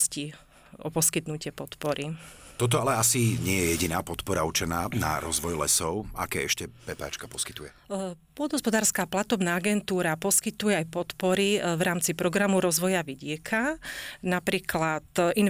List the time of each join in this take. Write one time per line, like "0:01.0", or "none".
none